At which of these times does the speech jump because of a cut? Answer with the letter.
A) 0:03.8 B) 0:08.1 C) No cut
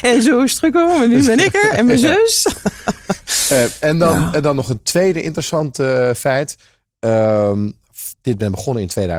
B